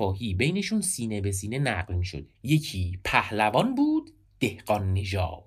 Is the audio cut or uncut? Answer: cut